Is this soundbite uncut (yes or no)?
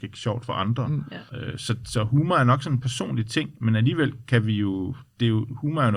no